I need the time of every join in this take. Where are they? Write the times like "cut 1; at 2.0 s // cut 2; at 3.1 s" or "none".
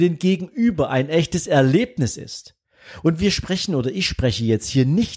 none